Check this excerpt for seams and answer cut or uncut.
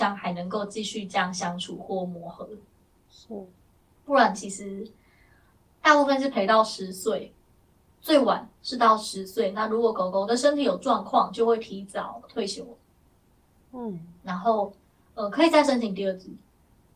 uncut